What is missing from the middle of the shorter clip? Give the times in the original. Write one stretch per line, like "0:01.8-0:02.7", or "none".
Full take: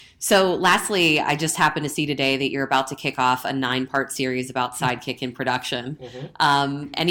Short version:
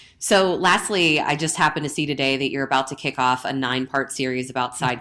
none